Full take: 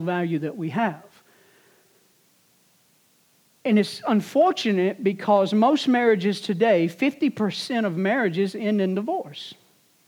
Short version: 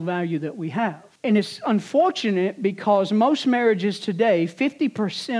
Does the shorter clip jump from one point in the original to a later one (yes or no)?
yes